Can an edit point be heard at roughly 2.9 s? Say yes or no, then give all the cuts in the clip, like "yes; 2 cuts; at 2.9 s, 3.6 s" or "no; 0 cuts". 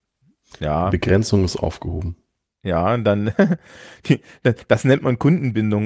no; 0 cuts